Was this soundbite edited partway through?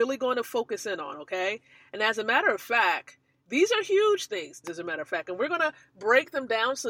yes; 1 cut; at 4.6 s

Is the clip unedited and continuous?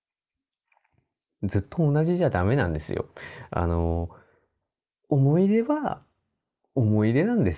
yes; 0 cuts

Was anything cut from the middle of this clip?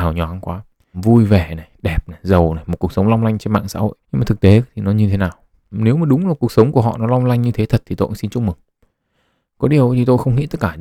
yes; 3 cuts; at 0.9 s, 4.0 s, 5.7 s

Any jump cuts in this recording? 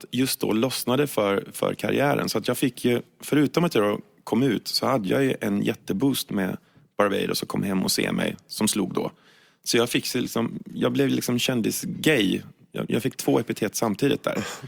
no; 0 cuts

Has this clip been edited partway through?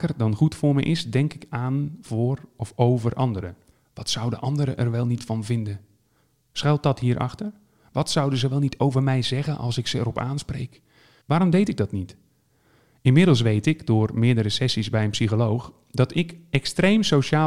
yes; 1 cut; at 11.2 s

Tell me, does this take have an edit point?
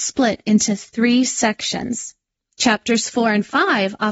yes; 1 cut; at 2.4 s

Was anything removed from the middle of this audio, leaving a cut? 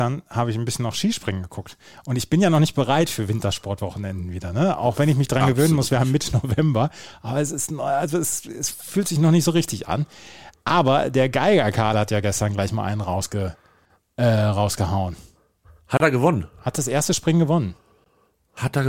no; 0 cuts

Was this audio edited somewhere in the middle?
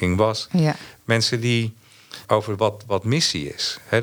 yes; 1 cut; at 2.2 s

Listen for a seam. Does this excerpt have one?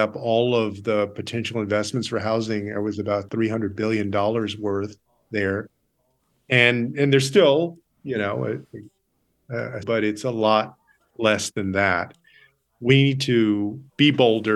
yes; 1 cut; at 9.8 s

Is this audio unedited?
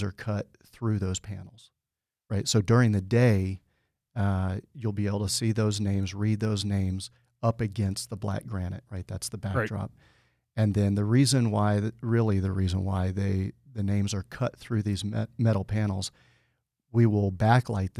yes; 0 cuts

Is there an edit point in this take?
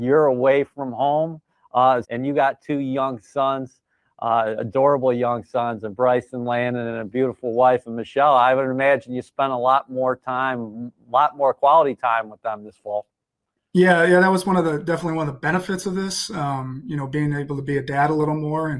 yes; 1 cut; at 2.0 s

